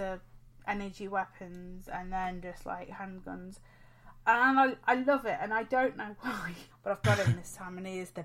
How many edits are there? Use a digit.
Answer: 1